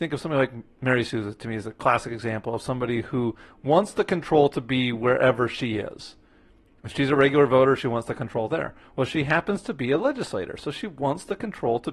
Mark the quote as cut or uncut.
uncut